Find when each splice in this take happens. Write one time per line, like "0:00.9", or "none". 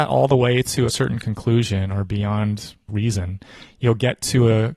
0:02.9